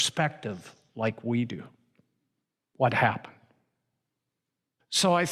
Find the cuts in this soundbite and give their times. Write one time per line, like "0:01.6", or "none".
0:02.6